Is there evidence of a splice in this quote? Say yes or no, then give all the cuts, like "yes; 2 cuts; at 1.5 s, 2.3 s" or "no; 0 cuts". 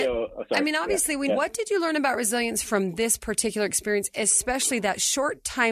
yes; 1 cut; at 1.3 s